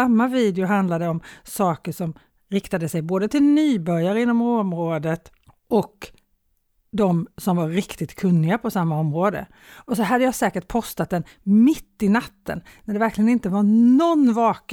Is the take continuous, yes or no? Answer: yes